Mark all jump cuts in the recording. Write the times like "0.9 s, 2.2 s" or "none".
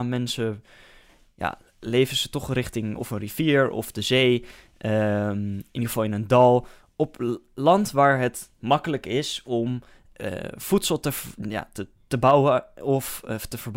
none